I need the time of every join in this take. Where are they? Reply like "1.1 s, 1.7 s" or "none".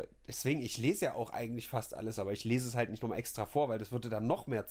2.2 s